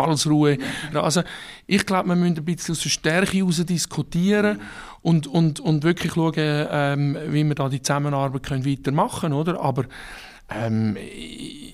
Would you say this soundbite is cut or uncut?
cut